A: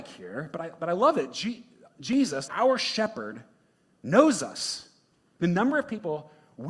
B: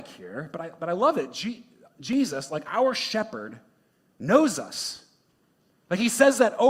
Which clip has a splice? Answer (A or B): A